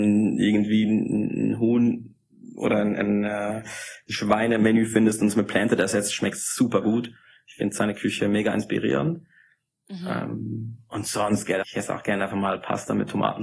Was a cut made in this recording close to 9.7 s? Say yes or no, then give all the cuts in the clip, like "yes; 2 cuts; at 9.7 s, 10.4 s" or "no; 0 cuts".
no; 1 cut; at 11.6 s